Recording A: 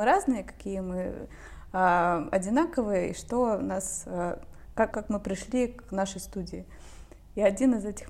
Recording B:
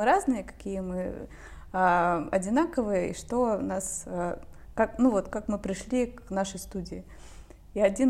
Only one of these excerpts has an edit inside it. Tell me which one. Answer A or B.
A